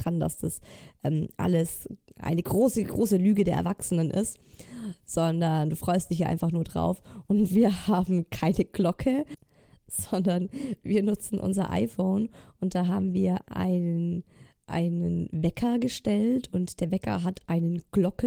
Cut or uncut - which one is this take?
uncut